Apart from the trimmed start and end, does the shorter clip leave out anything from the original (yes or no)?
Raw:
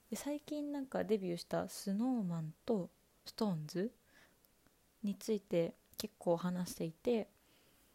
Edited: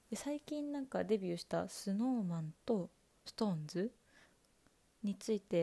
no